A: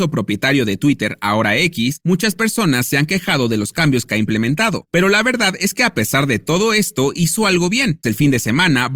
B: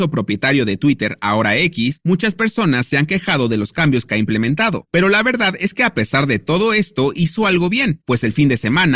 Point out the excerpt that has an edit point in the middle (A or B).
A